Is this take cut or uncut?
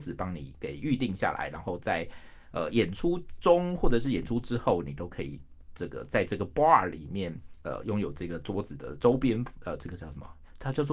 uncut